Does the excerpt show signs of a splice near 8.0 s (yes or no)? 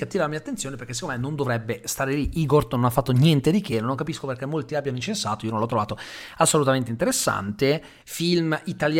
yes